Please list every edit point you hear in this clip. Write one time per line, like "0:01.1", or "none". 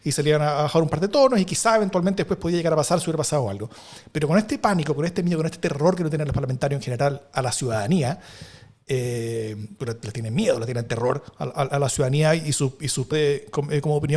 0:13.1